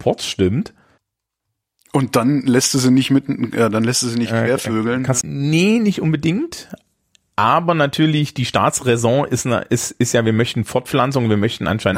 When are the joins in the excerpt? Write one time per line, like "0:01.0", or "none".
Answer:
0:05.2